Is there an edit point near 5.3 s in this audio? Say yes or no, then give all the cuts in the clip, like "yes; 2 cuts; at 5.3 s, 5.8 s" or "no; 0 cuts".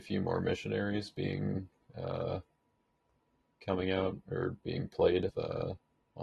yes; 1 cut; at 5.3 s